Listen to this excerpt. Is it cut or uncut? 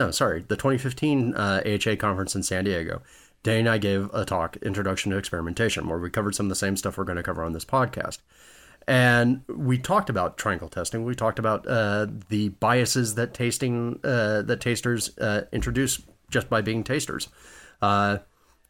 uncut